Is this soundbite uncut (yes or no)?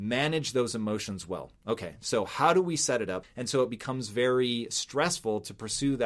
no